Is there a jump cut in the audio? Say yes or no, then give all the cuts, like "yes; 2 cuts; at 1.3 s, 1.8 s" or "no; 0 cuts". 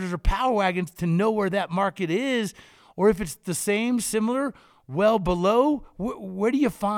no; 0 cuts